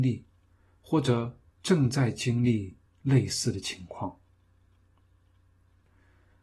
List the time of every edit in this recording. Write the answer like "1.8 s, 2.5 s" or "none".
none